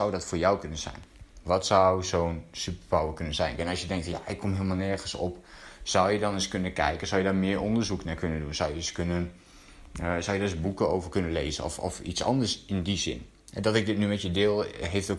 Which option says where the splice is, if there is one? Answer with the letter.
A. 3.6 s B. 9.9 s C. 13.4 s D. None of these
A